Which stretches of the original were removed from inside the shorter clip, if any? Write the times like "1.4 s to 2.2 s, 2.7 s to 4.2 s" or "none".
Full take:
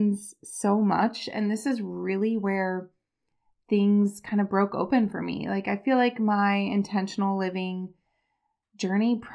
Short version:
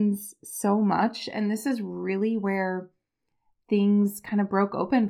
none